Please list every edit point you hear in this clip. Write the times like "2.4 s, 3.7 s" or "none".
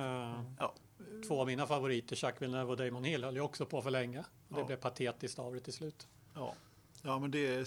none